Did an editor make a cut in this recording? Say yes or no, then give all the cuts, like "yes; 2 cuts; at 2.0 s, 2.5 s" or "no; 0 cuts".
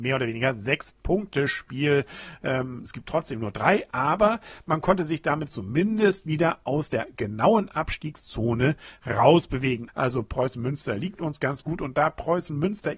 yes; 2 cuts; at 2.9 s, 9.9 s